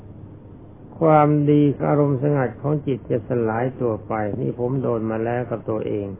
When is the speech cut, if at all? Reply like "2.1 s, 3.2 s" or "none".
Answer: 1.8 s